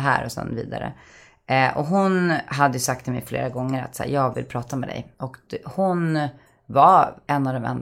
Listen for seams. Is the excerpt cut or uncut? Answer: uncut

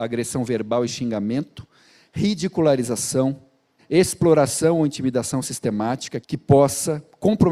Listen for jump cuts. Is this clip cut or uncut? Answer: cut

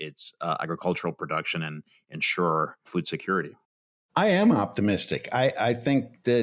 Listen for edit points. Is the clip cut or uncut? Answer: uncut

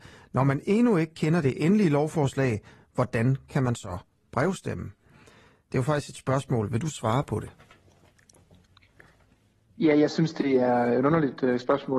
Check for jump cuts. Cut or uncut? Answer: uncut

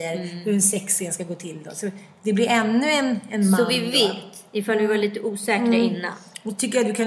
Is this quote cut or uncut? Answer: uncut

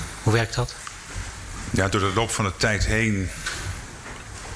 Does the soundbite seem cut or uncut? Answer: uncut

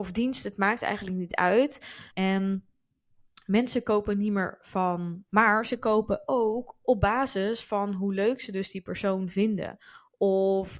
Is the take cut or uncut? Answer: cut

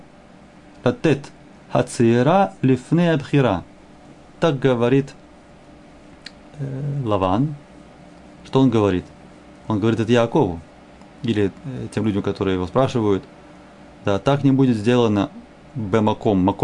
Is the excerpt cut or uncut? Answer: cut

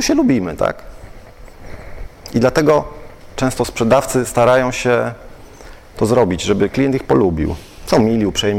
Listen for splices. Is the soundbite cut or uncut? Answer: uncut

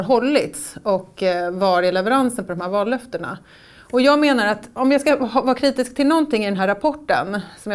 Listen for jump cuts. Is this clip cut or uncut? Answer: uncut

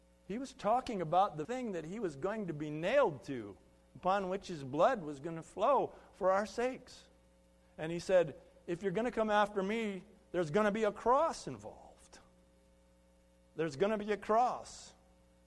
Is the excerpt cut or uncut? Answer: cut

